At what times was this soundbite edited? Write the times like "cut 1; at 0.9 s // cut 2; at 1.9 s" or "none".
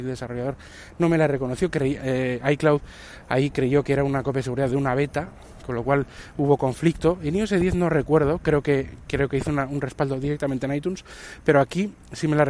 cut 1; at 2.0 s